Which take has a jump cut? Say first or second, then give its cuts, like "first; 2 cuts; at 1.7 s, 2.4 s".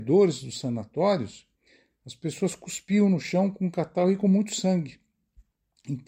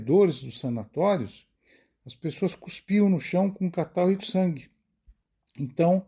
second; 1 cut; at 4.2 s